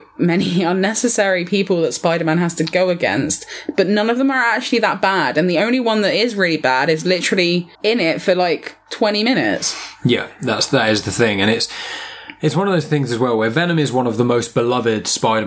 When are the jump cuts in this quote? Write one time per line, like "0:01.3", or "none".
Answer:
0:07.7